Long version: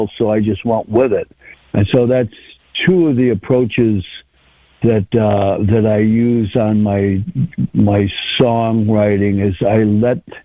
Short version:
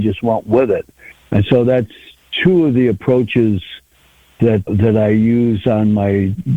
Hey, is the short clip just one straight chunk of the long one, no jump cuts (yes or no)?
no